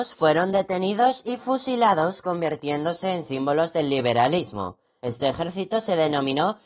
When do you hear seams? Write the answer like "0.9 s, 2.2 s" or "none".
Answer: 5.0 s